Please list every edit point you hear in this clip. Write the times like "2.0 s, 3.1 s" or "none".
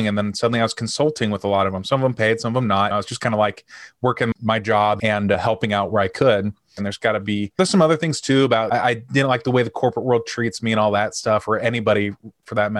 6.8 s